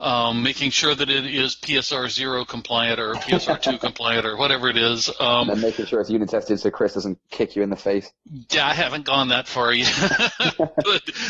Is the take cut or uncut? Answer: uncut